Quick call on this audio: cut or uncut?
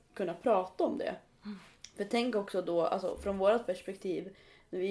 uncut